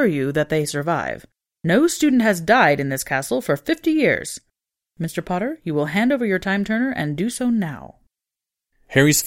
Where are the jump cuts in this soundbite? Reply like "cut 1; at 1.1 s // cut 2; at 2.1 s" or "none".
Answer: none